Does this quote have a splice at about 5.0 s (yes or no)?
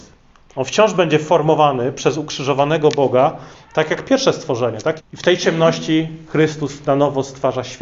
yes